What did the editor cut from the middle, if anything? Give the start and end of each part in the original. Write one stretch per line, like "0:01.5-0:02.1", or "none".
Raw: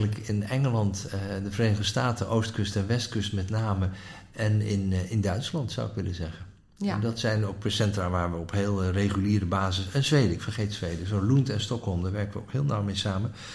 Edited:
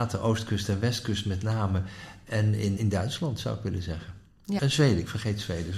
0:04.8-0:05.1
0:06.9-0:09.9